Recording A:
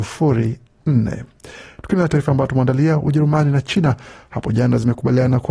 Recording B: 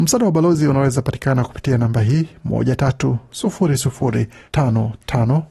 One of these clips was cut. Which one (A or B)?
B